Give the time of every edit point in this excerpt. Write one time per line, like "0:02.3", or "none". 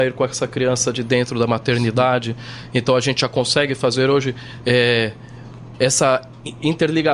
none